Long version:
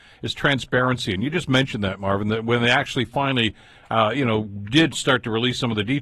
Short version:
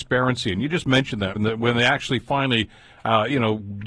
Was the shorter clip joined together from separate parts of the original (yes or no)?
yes